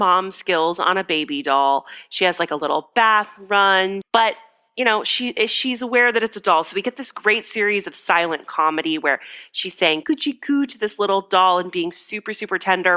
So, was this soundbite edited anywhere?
yes; 2 cuts; at 4.0 s, 10.0 s

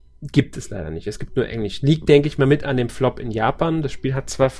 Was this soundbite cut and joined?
no; 0 cuts

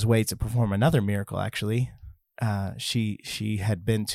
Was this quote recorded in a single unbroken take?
yes; 0 cuts

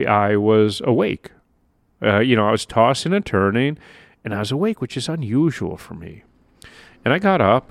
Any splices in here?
no; 0 cuts

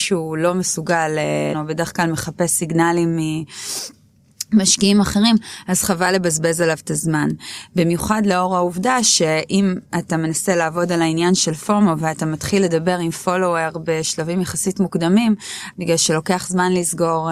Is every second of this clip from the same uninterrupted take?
no; 2 cuts; at 1.5 s, 15.7 s

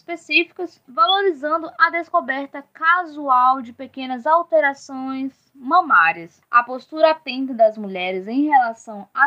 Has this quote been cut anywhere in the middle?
no; 0 cuts

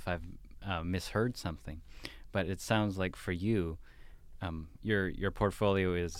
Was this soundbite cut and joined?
no; 0 cuts

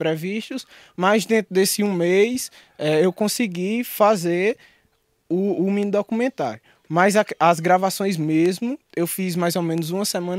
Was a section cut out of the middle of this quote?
no; 0 cuts

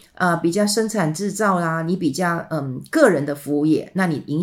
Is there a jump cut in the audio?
no; 0 cuts

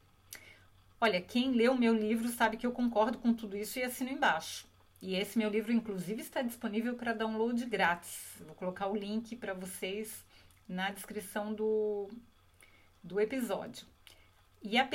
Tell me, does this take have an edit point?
no; 0 cuts

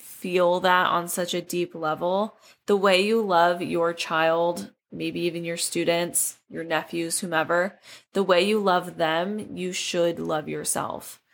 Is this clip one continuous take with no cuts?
yes; 0 cuts

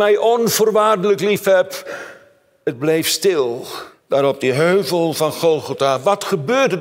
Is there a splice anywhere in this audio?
yes; 1 cut; at 3.9 s

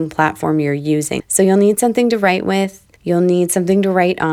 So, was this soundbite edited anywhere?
yes; 2 cuts; at 1.2 s, 3.0 s

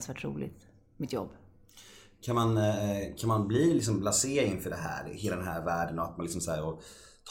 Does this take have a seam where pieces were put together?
no; 0 cuts

